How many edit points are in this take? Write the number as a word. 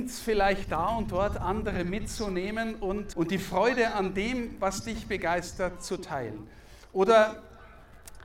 one